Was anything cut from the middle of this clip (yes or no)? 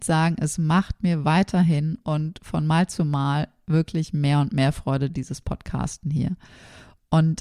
no